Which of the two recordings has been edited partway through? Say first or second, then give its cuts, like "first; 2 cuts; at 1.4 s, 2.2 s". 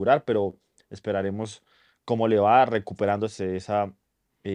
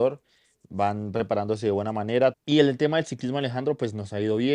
second; 1 cut; at 2.3 s